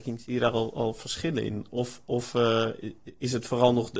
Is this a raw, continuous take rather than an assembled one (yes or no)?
yes